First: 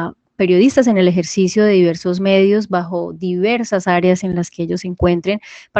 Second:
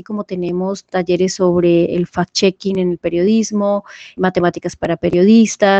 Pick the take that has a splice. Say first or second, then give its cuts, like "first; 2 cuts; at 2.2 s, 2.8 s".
second; 1 cut; at 4.2 s